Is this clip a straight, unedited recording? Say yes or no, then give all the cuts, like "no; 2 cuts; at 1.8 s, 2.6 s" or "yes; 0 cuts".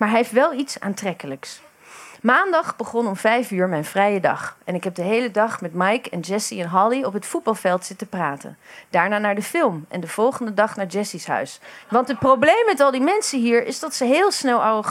no; 1 cut; at 11.8 s